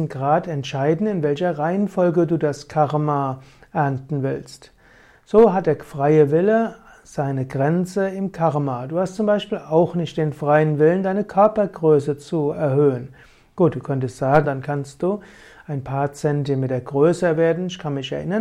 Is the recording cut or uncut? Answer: cut